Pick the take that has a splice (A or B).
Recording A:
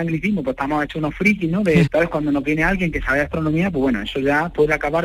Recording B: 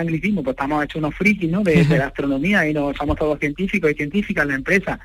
A